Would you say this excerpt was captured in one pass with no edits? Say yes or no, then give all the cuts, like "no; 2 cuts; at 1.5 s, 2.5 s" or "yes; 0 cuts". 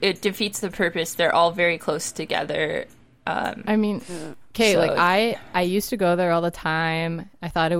yes; 0 cuts